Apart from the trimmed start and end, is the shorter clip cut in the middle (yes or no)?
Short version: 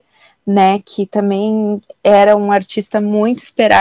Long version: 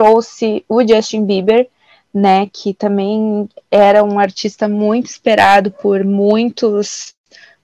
no